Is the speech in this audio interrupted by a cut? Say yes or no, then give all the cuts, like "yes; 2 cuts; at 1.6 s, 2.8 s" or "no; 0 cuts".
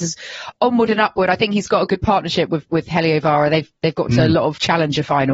no; 0 cuts